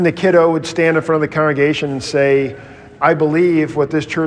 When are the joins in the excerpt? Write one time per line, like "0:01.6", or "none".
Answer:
0:02.9